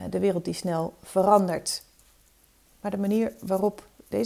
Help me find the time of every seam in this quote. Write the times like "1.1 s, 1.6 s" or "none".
2.7 s